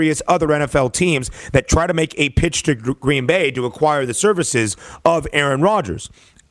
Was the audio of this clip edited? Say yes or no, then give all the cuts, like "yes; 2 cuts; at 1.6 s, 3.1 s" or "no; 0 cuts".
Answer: no; 0 cuts